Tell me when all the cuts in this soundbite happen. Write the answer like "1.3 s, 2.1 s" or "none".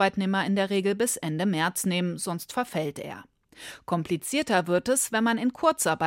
none